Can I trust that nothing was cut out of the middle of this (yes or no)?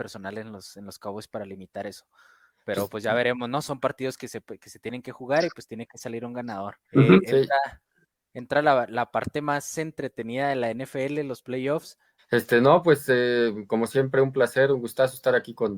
no